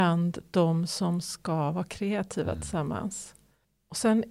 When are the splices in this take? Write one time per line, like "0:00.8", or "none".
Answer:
none